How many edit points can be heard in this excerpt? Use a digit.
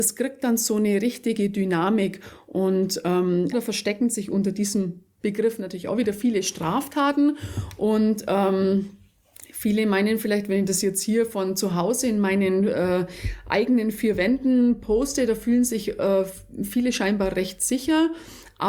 1